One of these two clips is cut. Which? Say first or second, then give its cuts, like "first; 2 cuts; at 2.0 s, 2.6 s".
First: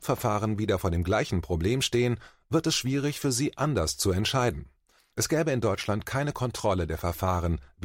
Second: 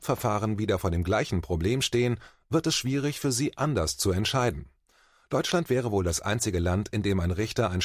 first; 1 cut; at 5.0 s